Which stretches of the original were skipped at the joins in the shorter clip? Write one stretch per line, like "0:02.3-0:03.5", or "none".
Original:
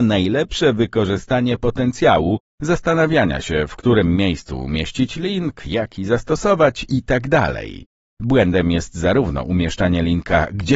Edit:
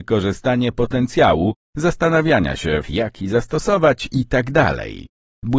0:03.7-0:05.6